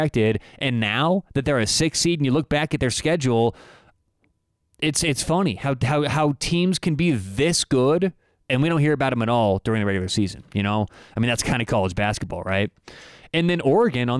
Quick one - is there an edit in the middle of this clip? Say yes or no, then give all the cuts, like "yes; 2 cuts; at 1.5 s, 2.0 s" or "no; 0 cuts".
no; 0 cuts